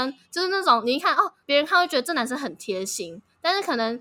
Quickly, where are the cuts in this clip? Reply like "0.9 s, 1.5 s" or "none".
none